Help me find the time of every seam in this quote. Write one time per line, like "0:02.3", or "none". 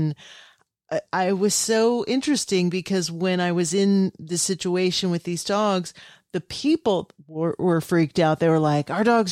none

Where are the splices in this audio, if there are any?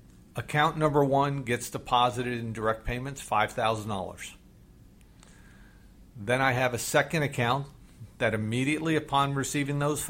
none

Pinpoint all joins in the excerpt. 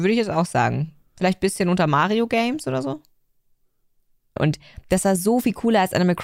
0:04.4

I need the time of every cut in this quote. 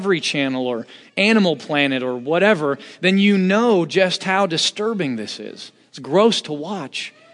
none

